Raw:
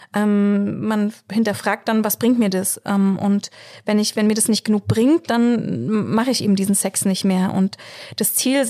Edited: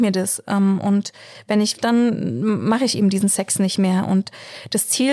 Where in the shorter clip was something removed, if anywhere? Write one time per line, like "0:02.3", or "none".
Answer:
0:01.8